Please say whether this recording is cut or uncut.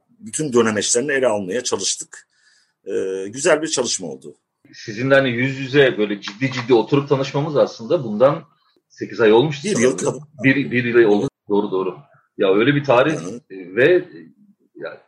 cut